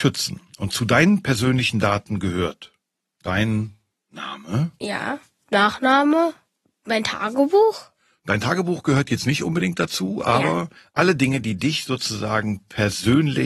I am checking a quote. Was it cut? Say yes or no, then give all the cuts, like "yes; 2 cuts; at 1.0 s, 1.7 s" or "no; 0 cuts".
no; 0 cuts